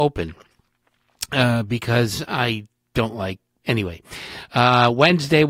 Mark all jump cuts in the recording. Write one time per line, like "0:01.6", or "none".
0:03.6